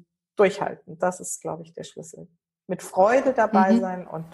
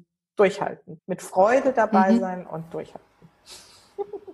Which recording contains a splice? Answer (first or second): second